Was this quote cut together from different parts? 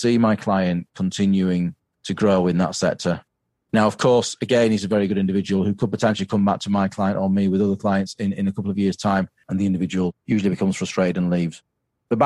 yes; 1 cut; at 9.4 s

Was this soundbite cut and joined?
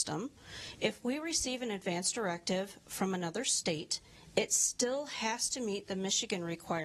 no; 0 cuts

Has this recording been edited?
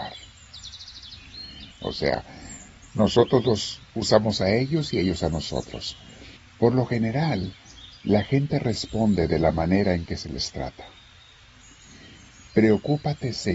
yes; 2 cuts; at 1.7 s, 6.4 s

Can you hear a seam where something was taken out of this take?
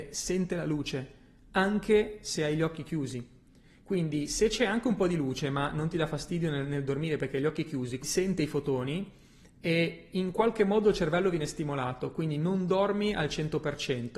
yes; 1 cut; at 8.0 s

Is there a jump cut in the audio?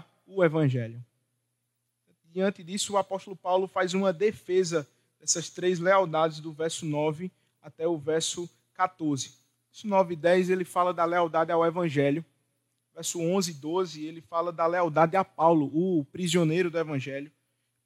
no; 0 cuts

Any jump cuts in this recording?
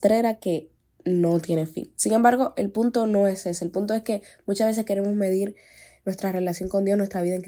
no; 0 cuts

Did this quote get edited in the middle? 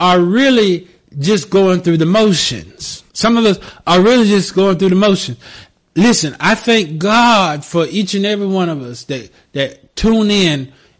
yes; 1 cut; at 3.1 s

